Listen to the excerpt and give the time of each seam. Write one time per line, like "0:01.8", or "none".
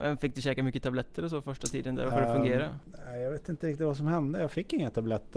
0:02.1